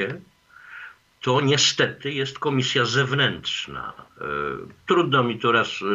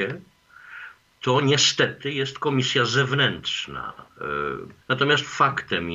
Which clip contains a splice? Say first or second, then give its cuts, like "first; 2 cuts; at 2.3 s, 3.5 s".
second; 1 cut; at 4.8 s